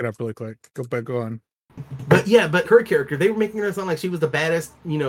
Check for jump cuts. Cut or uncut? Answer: cut